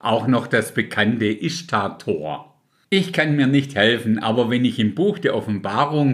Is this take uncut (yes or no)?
no